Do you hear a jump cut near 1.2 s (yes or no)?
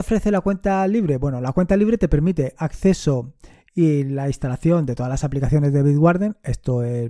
no